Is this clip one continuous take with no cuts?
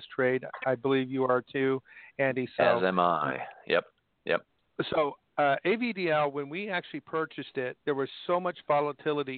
yes; 0 cuts

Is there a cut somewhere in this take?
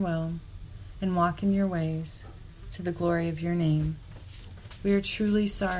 yes; 1 cut; at 4.8 s

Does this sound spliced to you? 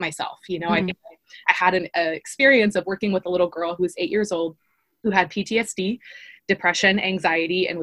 no; 0 cuts

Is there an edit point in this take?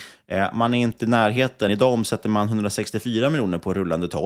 no; 0 cuts

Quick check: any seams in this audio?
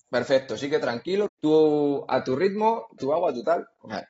yes; 2 cuts; at 1.3 s, 3.0 s

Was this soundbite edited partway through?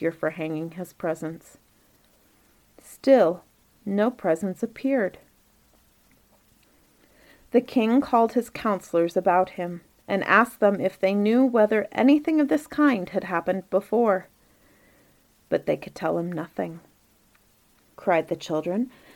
yes; 1 cut; at 17.9 s

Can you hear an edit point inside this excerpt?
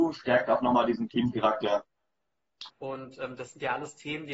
yes; 1 cut; at 2.7 s

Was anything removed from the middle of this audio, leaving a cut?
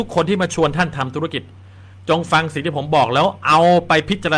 no; 0 cuts

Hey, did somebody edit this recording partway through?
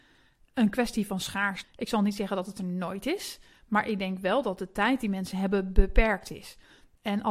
yes; 1 cut; at 1.6 s

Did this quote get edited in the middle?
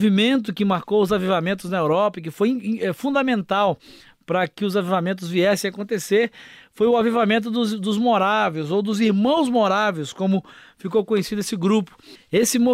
no; 0 cuts

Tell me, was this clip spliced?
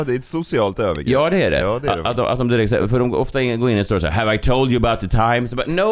no; 0 cuts

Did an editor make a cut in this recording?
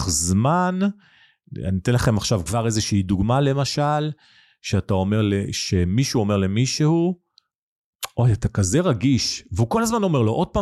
no; 0 cuts

